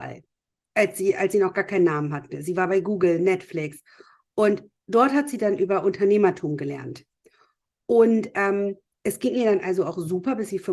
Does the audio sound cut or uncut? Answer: uncut